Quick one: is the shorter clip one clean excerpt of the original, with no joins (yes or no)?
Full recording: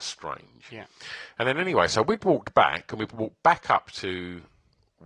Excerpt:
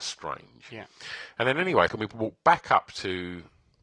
no